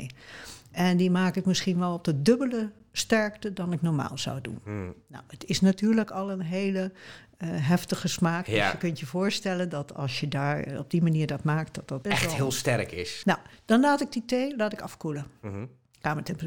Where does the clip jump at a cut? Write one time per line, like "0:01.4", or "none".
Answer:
0:12.0
0:13.2